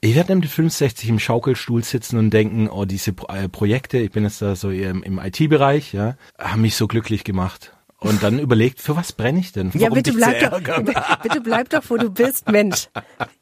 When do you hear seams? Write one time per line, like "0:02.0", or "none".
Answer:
0:06.3
0:09.7

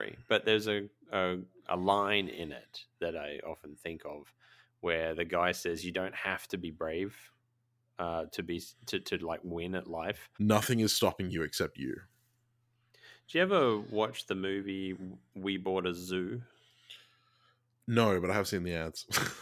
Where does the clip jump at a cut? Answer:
0:10.3

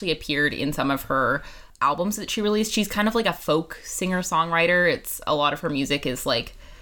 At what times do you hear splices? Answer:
none

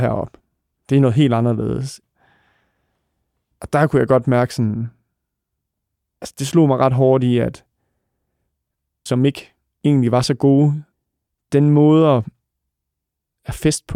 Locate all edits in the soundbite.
0:09.1

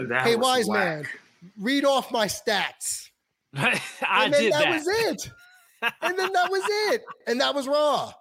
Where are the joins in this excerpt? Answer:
0:07.2

